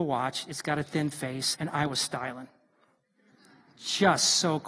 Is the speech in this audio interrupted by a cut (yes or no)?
yes